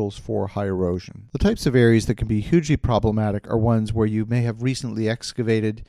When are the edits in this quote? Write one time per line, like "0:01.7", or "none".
none